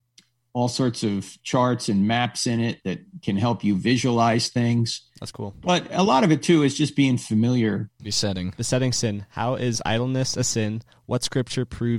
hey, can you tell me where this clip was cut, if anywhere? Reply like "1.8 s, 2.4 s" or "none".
8.0 s